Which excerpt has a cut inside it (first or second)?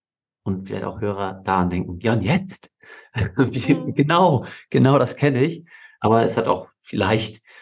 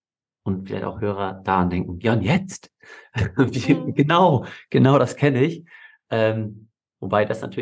first